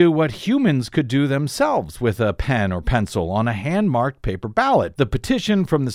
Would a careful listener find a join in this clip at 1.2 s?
no; 1 cut; at 5.0 s

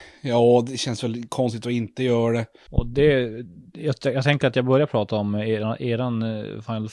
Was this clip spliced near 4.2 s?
no; 1 cut; at 2.7 s

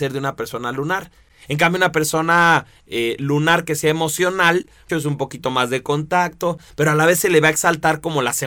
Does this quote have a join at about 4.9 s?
yes; 1 cut; at 4.9 s

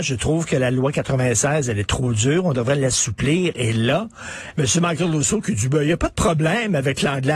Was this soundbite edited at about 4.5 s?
yes; 1 cut; at 4.5 s

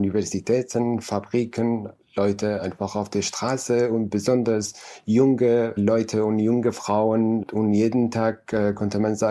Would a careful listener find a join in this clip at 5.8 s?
yes; 1 cut; at 5.8 s

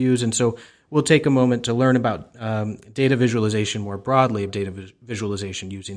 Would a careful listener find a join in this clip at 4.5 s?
yes; 1 cut; at 4.5 s

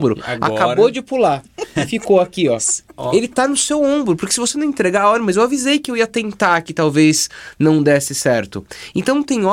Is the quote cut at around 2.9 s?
no; 0 cuts

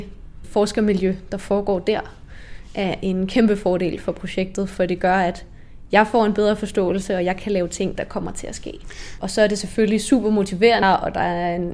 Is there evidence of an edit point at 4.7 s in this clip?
no; 3 cuts; at 8.0 s, 9.2 s, 10.8 s

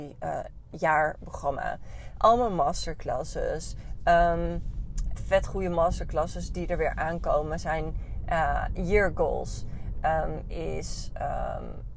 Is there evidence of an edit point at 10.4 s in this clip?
no; 1 cut; at 5.2 s

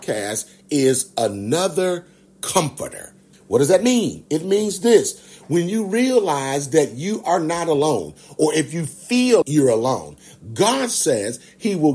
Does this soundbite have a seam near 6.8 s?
no; 2 cuts; at 3.3 s, 9.4 s

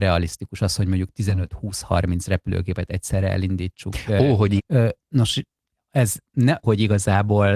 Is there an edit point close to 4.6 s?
yes; 2 cuts; at 4.6 s, 6.6 s

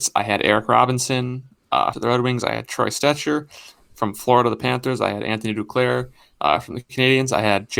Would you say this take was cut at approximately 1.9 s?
yes; 1 cut; at 1.9 s

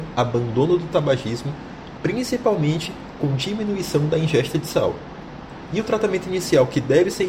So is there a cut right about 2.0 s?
yes; 2 cuts; at 2.0 s, 5.7 s

